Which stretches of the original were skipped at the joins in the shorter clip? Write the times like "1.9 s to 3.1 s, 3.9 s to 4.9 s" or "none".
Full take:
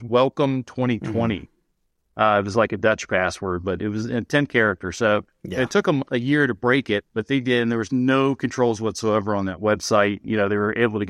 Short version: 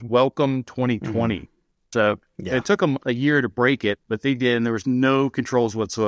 1.9 s to 5.0 s

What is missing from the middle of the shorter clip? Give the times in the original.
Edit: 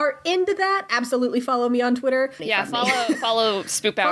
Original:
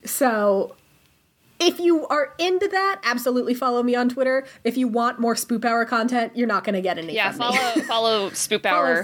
4.5 s to 7.1 s

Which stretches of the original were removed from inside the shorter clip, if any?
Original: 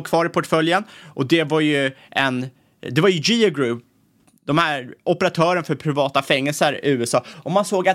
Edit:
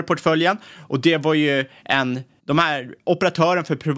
2.6 s to 4.4 s

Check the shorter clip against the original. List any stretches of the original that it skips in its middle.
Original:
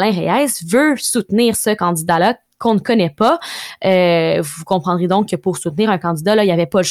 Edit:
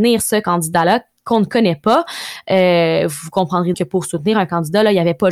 5.1 s to 5.3 s

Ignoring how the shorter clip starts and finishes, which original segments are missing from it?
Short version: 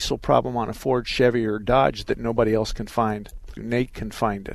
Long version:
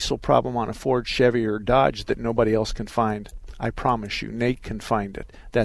3.6 s to 4.3 s

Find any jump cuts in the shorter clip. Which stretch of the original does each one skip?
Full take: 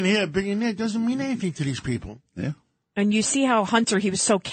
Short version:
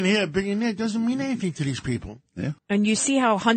2.6 s to 2.9 s

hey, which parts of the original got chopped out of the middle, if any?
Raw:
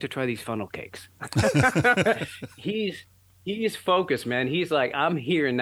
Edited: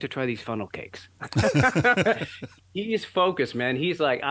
2.6 s to 3.3 s

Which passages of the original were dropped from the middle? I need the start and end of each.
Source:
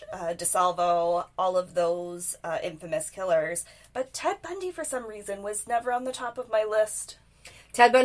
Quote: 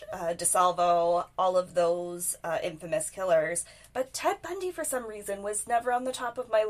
none

